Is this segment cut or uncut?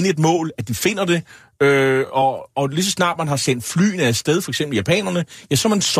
uncut